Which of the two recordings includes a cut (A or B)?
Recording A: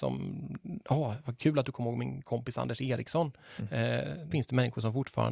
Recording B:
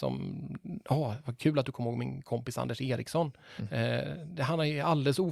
A